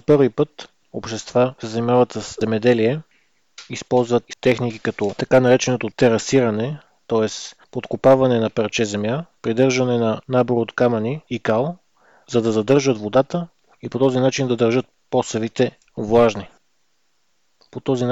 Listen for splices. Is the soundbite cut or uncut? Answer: cut